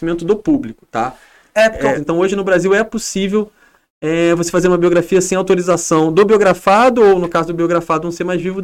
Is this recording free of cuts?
no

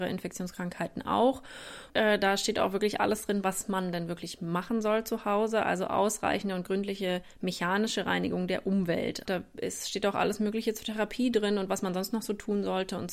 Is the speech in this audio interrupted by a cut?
yes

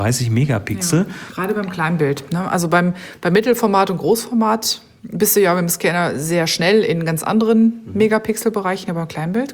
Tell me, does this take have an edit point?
yes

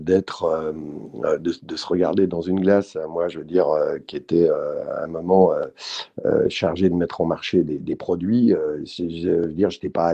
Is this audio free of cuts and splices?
yes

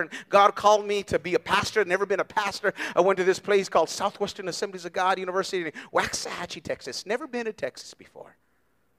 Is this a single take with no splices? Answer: yes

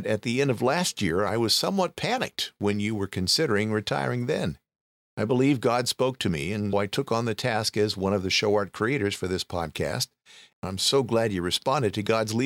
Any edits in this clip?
yes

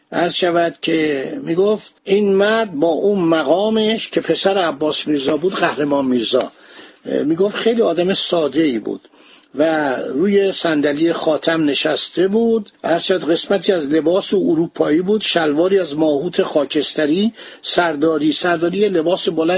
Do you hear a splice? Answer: yes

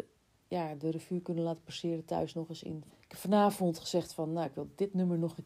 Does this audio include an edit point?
yes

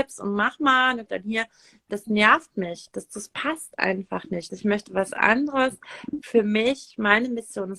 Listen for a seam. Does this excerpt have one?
yes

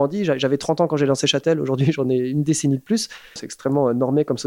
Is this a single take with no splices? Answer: no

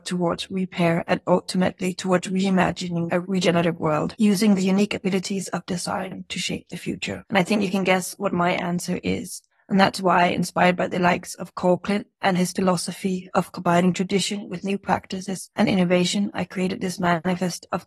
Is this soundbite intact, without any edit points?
no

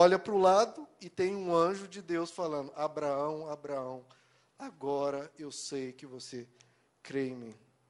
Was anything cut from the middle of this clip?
no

